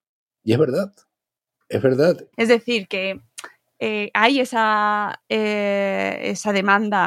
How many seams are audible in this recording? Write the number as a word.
one